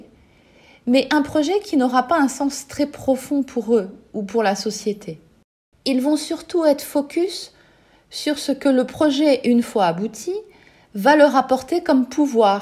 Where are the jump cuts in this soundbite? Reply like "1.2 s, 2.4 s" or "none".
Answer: none